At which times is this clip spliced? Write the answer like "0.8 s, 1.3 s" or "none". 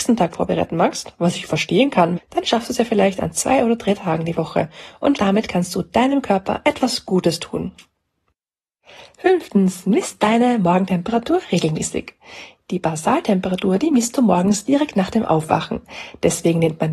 2.2 s, 5.2 s